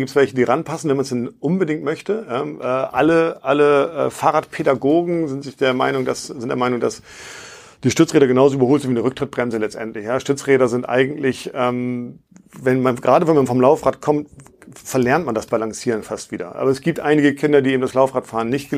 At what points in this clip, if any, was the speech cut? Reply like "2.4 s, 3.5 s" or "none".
none